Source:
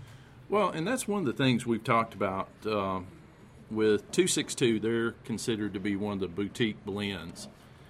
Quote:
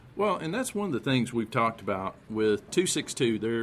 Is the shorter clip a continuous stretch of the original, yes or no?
no